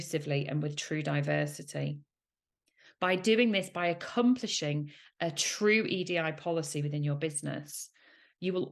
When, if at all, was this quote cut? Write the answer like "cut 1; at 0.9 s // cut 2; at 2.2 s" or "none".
none